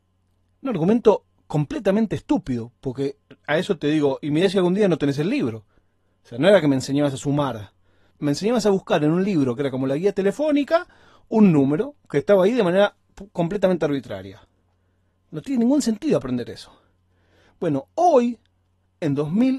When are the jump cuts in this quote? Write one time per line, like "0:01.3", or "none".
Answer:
none